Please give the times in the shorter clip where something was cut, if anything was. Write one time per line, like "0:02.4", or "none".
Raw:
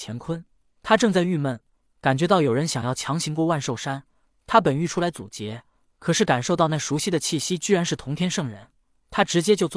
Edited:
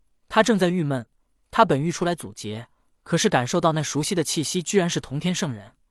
0:01.4